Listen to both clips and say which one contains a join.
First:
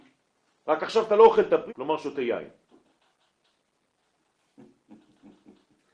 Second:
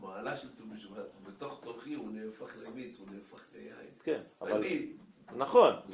first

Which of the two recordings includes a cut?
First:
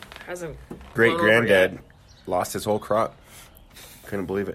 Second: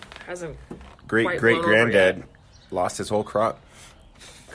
first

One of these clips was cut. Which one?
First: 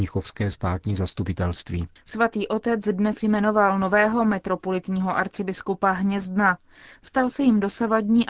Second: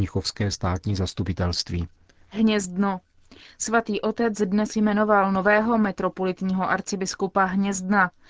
first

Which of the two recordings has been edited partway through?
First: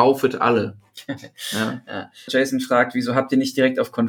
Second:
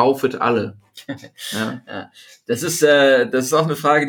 first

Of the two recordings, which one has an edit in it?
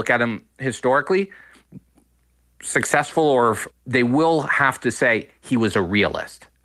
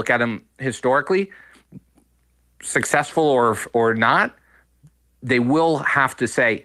first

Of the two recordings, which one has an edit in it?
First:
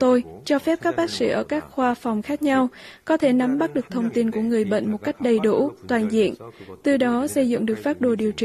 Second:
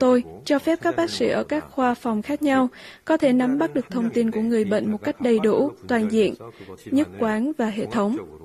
second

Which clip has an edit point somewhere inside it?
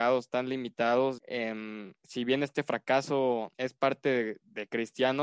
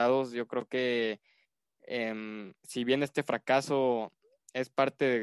first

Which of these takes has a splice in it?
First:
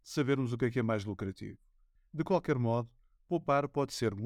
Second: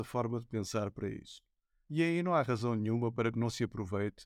first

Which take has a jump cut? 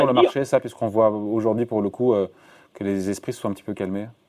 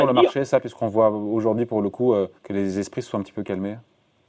second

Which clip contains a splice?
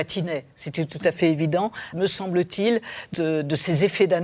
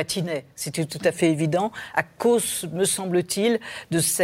first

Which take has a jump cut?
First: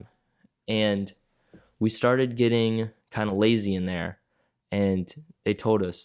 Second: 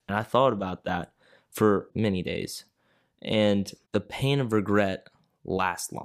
first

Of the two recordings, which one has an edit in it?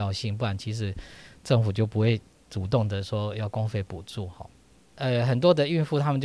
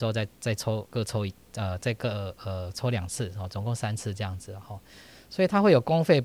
first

